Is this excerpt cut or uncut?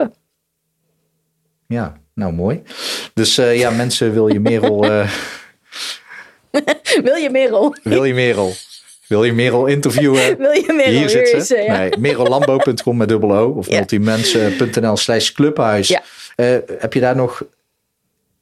uncut